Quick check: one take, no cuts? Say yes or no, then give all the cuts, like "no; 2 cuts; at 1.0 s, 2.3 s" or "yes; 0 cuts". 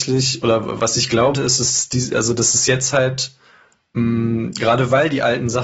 no; 1 cut; at 1.3 s